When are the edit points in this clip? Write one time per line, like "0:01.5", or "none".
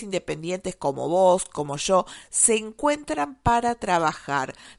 none

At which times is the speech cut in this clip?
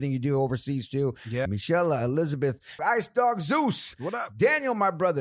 0:01.5
0:02.8

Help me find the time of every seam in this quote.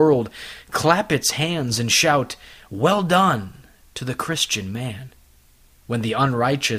none

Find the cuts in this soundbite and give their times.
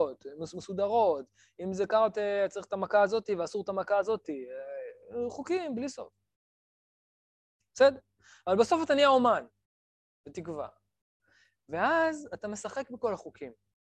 none

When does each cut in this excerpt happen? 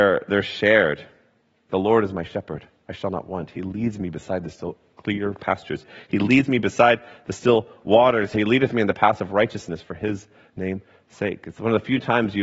0:01.7
0:08.3

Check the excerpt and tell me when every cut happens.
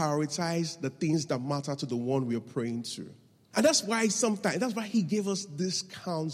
0:03.5

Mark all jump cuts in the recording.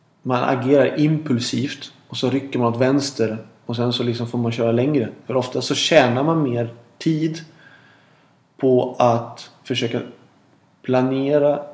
0:05.3

